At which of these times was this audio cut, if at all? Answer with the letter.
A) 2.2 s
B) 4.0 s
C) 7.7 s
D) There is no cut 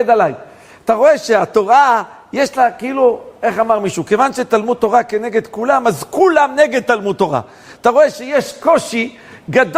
D